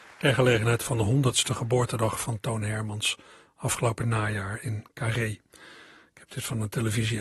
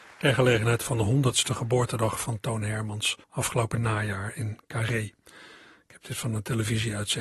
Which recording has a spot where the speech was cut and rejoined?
second; 1 cut; at 3.2 s

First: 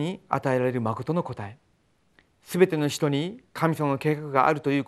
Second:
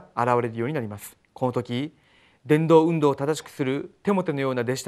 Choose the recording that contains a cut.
second; 1 cut; at 1.2 s

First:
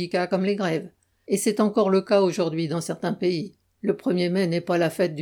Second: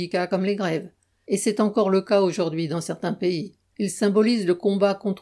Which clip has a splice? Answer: second; 1 cut; at 3.7 s

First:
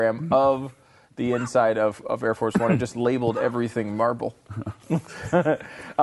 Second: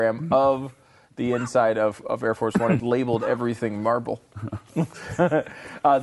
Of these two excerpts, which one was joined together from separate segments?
second; 1 cut; at 2.8 s

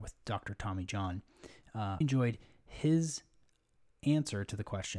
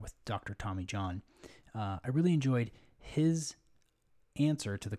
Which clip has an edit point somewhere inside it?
first; 1 cut; at 2.0 s

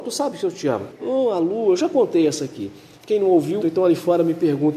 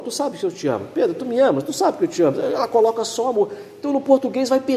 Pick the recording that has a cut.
first; 2 cuts; at 0.9 s, 3.6 s

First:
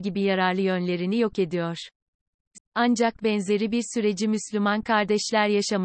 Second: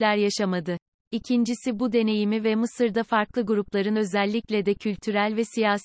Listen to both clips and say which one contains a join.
first; 1 cut; at 2.6 s

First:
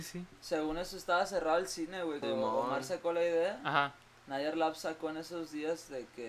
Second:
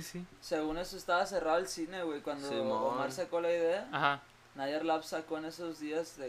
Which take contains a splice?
first; 1 cut; at 2.2 s

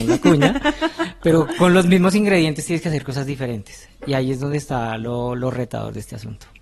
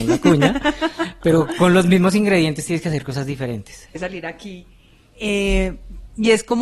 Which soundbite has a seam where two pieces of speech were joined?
second; 1 cut; at 3.9 s

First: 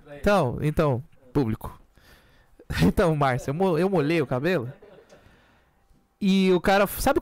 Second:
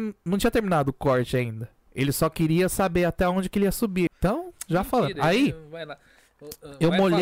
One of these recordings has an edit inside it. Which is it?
second; 1 cut; at 4.1 s

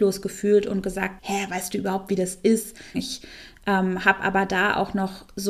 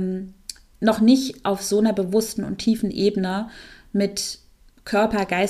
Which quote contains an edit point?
first; 2 cuts; at 1.2 s, 2.9 s

